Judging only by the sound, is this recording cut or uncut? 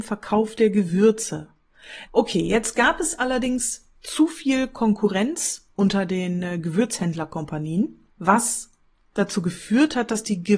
cut